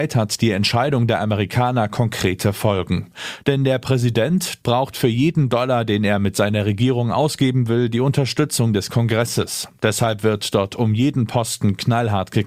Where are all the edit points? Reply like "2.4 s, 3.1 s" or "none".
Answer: 4.6 s

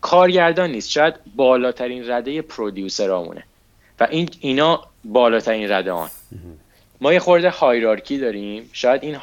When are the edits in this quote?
6.9 s

